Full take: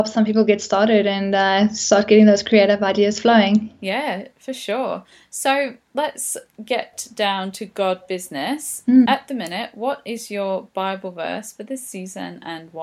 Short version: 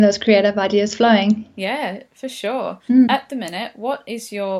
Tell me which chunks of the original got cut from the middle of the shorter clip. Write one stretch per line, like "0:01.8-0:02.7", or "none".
0:05.1-0:08.8